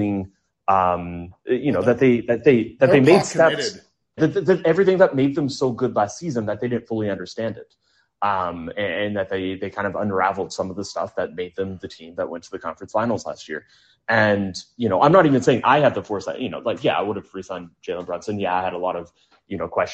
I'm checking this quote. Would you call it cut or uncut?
cut